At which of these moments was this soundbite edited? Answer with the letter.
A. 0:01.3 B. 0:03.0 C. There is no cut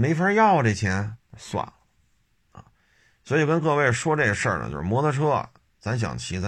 A